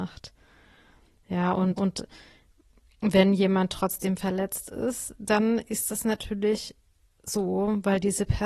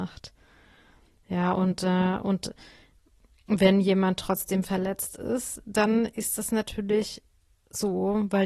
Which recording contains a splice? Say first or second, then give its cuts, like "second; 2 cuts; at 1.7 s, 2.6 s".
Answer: first; 1 cut; at 1.8 s